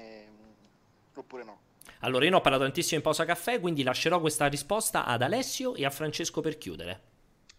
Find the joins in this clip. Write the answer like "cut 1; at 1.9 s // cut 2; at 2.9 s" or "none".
none